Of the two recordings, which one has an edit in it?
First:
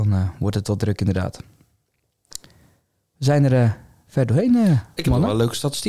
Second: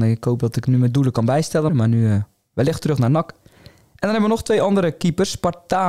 second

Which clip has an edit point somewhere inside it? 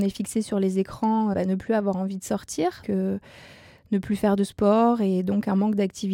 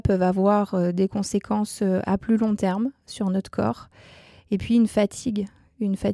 first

